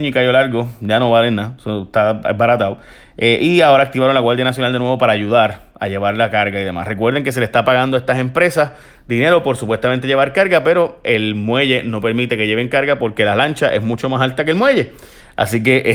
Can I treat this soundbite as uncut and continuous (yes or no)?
yes